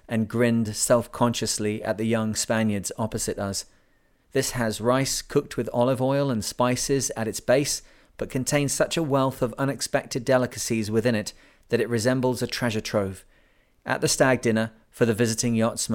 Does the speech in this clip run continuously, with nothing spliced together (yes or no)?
no